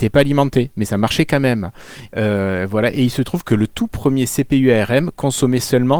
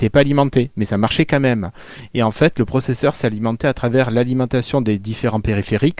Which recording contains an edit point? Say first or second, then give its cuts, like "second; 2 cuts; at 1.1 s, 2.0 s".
first; 1 cut; at 2.1 s